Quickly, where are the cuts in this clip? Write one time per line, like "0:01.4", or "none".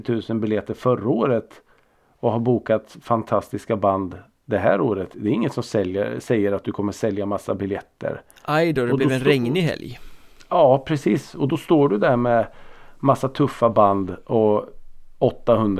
none